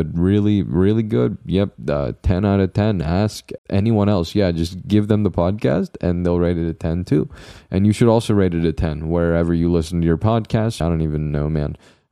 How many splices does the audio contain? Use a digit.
2